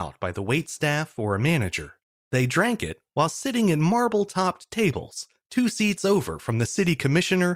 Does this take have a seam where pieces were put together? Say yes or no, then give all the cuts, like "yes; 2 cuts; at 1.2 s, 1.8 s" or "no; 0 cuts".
yes; 1 cut; at 2.2 s